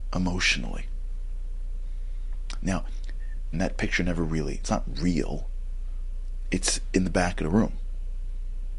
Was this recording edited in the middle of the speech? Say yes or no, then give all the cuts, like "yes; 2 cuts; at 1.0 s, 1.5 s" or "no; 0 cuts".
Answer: yes; 1 cut; at 3.5 s